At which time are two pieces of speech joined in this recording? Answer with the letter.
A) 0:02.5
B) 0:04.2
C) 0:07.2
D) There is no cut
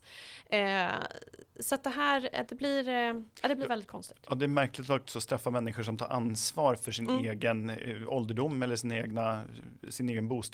A